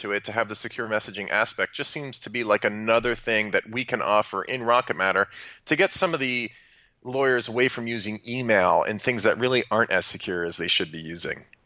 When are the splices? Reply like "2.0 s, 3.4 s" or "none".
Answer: none